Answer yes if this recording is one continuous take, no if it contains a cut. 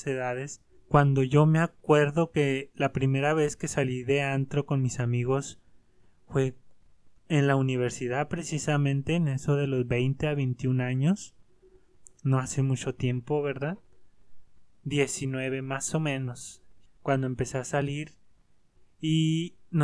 no